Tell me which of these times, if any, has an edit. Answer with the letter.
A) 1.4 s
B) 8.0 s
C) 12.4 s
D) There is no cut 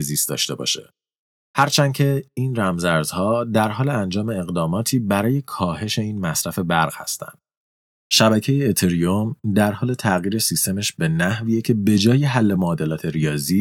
A